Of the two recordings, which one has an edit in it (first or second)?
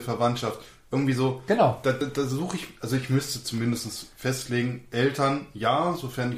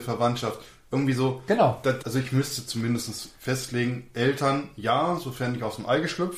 second